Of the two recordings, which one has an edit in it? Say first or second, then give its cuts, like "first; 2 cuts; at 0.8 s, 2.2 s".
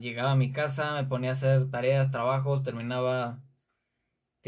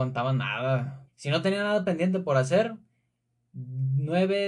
second; 1 cut; at 1.1 s